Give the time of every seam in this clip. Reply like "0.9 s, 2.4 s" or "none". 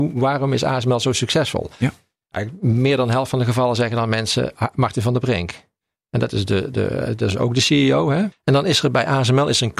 6.7 s, 8.3 s